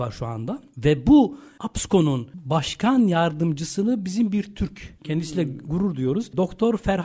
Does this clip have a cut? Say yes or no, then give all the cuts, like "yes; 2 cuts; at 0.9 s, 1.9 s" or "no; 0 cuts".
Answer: no; 0 cuts